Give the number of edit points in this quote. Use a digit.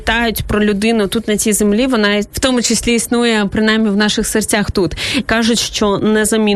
2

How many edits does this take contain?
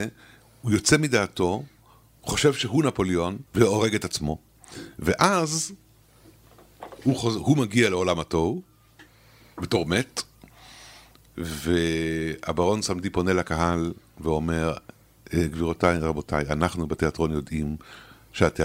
1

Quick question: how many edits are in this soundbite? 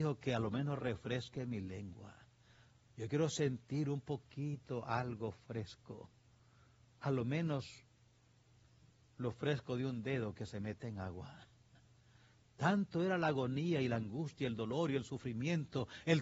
0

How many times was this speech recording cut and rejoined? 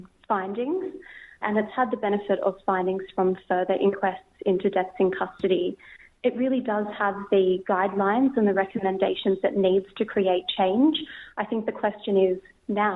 1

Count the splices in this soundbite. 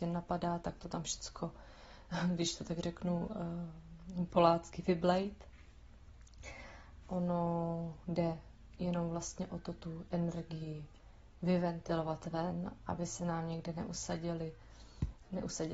1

